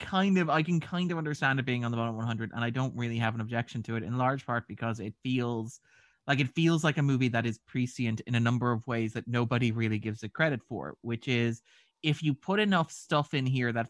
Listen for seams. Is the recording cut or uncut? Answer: uncut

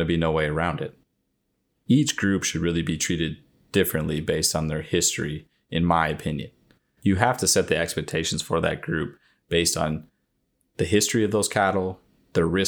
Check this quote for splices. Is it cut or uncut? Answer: uncut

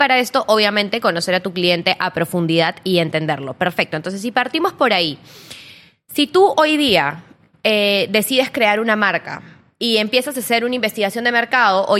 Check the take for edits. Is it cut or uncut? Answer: uncut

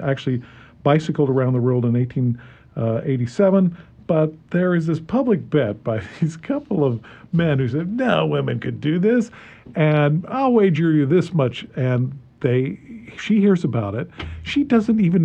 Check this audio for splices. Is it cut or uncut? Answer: uncut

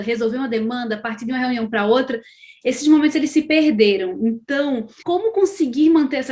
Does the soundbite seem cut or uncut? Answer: cut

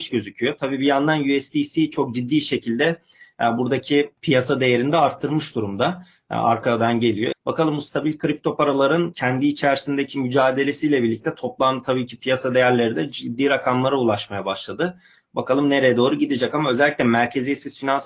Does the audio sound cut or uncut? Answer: cut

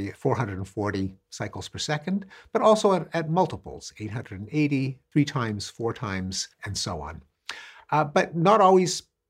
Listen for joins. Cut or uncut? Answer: uncut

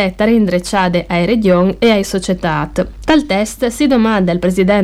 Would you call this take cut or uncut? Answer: cut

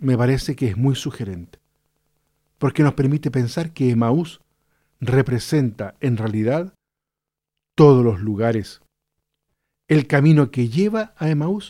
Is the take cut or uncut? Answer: uncut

